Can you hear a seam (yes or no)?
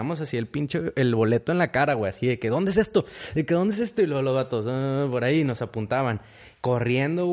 no